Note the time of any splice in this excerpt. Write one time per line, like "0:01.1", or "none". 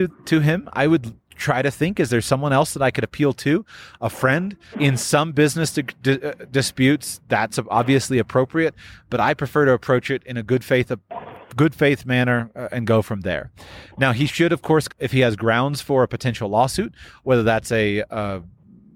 0:04.7
0:14.9